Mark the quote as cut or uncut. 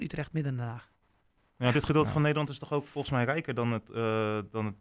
uncut